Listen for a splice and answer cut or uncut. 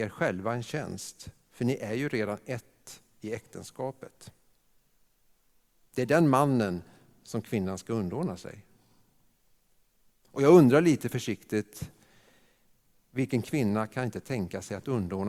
uncut